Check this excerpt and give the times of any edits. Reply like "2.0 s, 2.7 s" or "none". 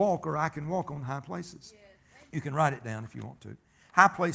2.3 s